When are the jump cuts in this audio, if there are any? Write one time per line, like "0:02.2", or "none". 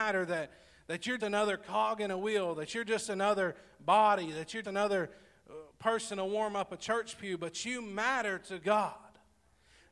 0:01.2
0:04.6